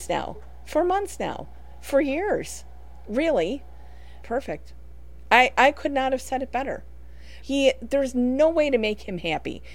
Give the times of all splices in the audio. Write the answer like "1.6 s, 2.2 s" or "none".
4.2 s, 7.4 s